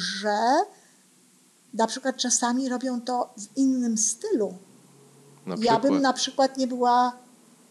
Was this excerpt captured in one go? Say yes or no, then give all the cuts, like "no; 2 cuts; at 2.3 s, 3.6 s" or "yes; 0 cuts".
yes; 0 cuts